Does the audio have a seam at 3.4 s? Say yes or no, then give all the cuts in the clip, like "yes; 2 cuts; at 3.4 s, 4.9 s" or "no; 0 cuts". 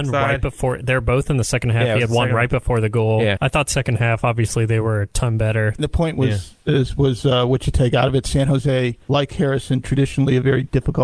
yes; 2 cuts; at 3.4 s, 5.8 s